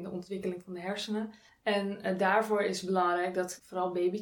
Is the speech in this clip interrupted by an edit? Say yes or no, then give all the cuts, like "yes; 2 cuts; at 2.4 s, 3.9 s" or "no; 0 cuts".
no; 0 cuts